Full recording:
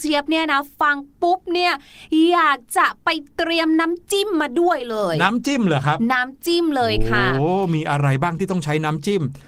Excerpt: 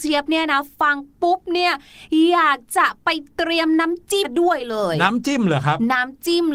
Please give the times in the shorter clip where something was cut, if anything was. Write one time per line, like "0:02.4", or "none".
0:04.2